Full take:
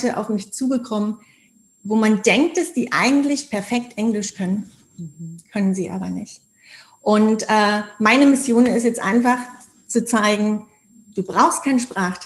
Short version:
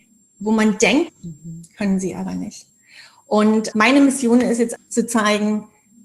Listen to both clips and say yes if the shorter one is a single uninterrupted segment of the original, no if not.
no